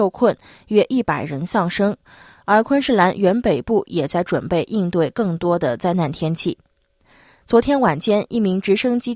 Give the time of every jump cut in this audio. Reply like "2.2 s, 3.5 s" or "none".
none